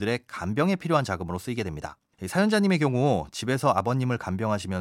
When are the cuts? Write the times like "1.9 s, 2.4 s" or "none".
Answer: 2.1 s